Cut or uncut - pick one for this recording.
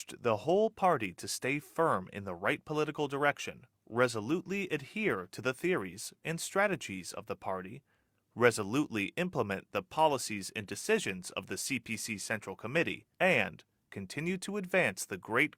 cut